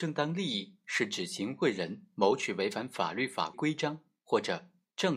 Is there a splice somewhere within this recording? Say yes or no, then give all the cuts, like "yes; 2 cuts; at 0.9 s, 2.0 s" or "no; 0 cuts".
yes; 1 cut; at 3.5 s